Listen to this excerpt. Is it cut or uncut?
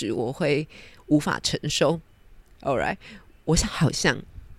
cut